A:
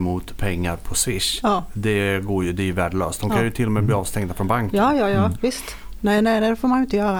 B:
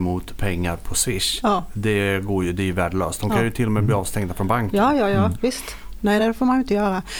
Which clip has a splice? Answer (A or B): B